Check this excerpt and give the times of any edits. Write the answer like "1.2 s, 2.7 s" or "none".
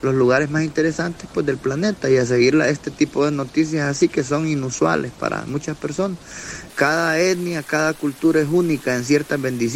6.7 s

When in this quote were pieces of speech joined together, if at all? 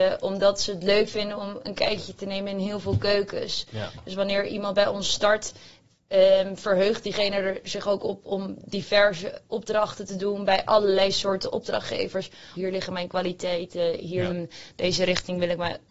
12.5 s, 14.3 s

